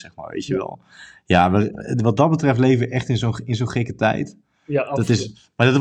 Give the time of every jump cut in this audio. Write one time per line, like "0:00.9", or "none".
none